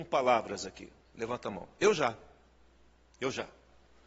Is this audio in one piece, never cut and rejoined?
yes; 0 cuts

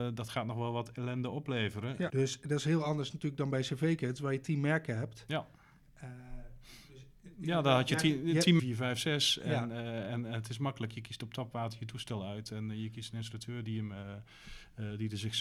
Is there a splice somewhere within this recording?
yes; 2 cuts; at 2.1 s, 8.6 s

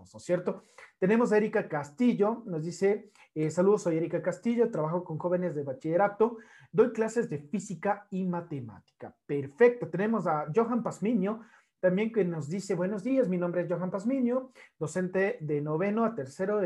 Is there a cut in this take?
no; 0 cuts

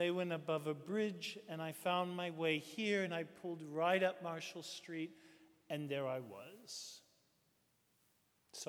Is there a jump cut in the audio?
no; 0 cuts

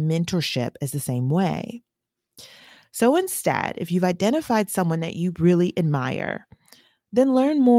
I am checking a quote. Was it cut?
no; 0 cuts

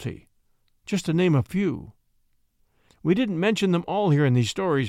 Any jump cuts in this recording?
yes; 1 cut; at 2.9 s

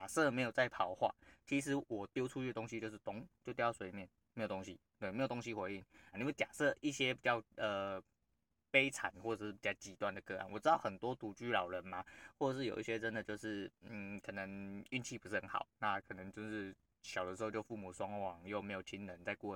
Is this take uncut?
no; 1 cut; at 6.1 s

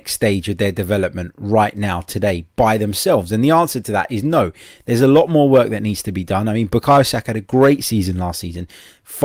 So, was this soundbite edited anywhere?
no; 0 cuts

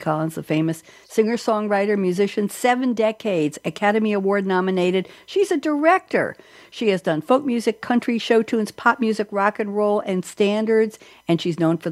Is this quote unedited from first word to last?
yes; 0 cuts

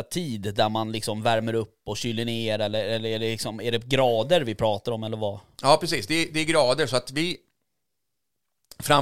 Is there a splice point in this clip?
no; 0 cuts

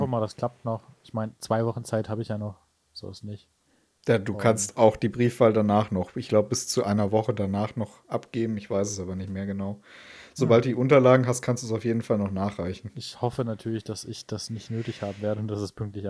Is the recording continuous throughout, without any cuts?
yes; 0 cuts

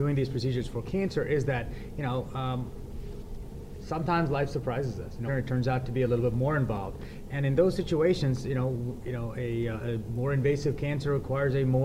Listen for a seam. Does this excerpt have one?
yes; 1 cut; at 5.3 s

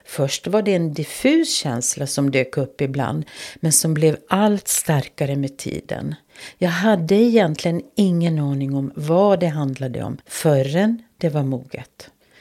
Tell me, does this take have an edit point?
yes; 1 cut; at 10.2 s

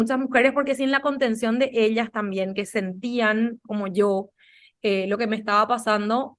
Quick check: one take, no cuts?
yes; 0 cuts

